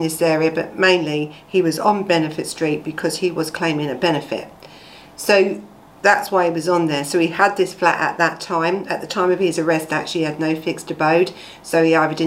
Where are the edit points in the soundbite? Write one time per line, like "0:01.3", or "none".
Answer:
none